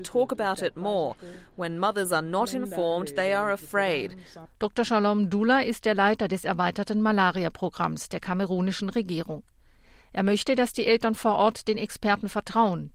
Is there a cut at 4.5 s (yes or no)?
yes